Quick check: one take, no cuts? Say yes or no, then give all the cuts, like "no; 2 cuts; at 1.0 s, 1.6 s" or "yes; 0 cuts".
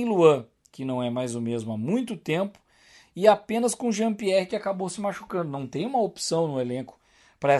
yes; 0 cuts